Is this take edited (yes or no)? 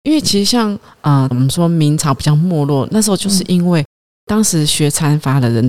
yes